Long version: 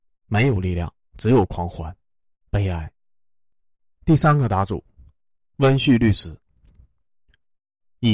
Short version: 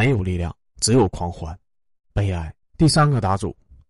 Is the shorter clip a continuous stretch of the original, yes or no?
no